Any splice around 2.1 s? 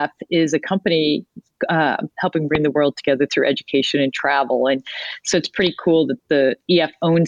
yes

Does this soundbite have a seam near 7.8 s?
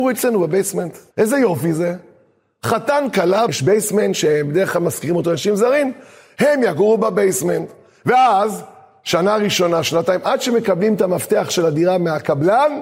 no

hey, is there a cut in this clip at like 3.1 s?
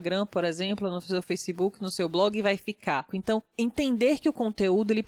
yes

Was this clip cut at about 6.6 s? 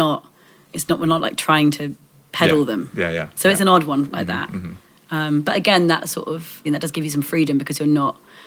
yes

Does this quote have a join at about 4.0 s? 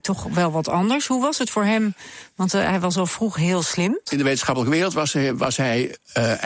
yes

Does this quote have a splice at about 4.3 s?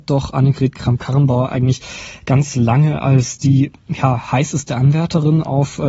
no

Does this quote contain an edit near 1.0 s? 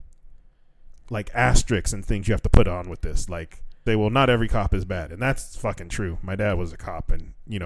no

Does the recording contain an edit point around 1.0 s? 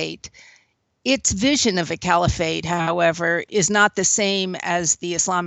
no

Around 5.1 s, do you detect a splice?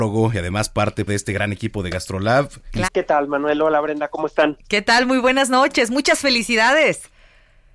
no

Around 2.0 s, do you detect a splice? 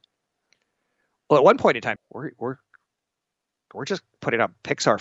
yes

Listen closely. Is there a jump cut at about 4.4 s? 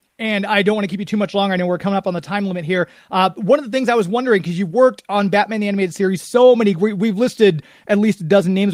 no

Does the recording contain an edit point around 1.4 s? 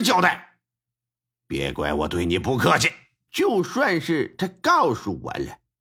no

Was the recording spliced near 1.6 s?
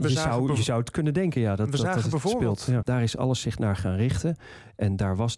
no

